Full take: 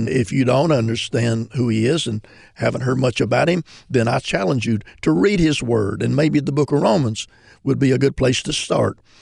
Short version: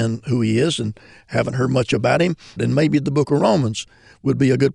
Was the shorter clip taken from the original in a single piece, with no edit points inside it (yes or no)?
no